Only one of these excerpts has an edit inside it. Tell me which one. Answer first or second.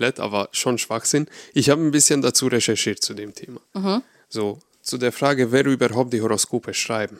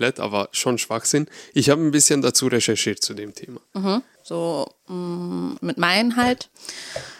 second